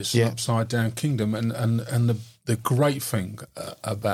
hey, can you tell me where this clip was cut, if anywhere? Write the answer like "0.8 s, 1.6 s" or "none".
none